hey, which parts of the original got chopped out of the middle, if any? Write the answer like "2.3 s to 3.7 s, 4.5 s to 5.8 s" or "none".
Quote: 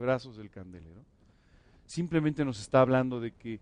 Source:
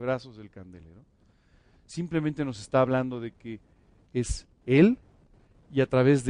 none